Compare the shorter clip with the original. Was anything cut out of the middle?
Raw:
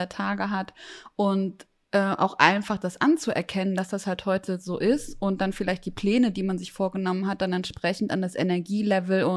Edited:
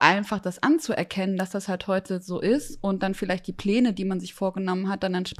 no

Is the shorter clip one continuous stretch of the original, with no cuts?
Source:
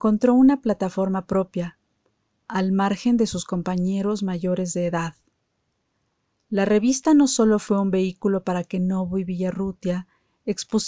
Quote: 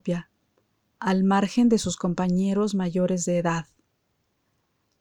yes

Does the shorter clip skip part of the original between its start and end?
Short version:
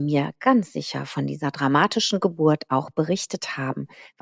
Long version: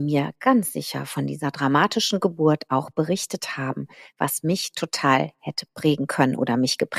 no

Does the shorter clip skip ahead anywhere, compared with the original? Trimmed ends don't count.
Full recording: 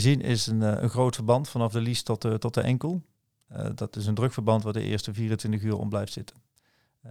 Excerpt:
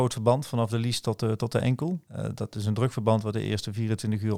yes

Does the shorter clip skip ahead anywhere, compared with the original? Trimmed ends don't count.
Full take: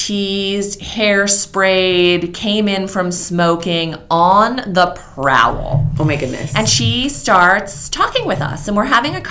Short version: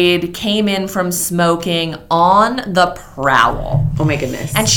no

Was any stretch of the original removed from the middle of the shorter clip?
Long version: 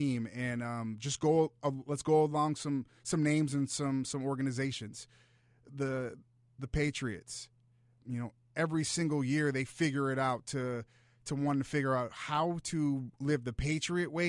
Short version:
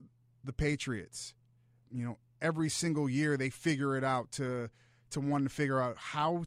no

